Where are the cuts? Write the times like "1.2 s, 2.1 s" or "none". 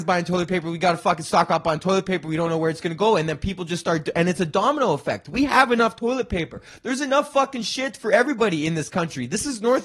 none